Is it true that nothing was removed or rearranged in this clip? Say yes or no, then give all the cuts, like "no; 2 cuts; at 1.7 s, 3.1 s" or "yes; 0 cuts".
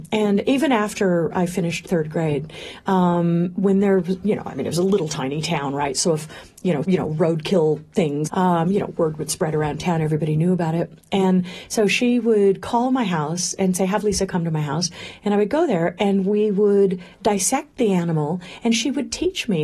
no; 2 cuts; at 6.8 s, 8.3 s